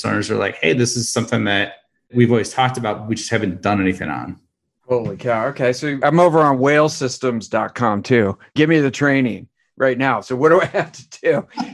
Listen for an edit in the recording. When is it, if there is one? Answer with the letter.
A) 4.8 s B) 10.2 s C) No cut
A